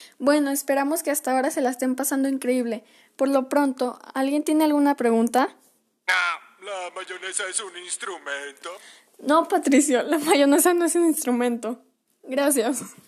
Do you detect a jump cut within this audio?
no; 0 cuts

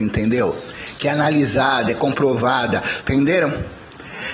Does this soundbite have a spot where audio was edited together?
yes; 1 cut; at 3.0 s

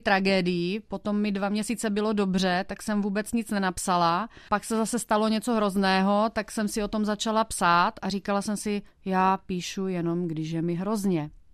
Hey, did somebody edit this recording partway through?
no; 0 cuts

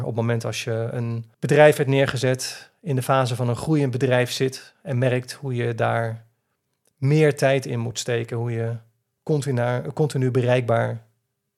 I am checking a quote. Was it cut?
yes; 1 cut; at 1.3 s

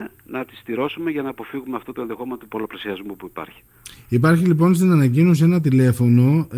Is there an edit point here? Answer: no; 0 cuts

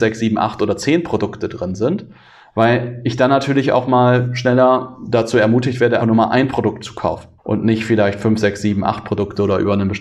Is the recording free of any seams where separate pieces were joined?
no; 2 cuts; at 6.0 s, 7.4 s

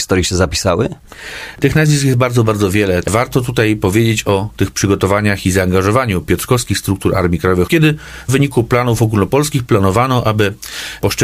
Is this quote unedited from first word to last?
no; 2 cuts; at 3.0 s, 7.7 s

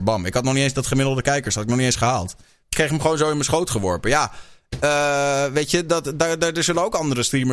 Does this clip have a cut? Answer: no; 0 cuts

